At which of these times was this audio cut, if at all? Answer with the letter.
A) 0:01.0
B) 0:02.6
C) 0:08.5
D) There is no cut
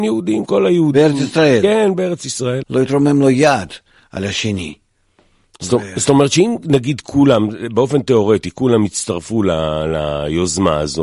B